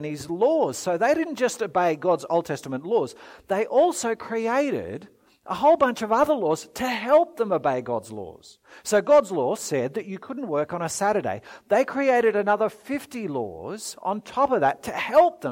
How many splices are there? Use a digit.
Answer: 0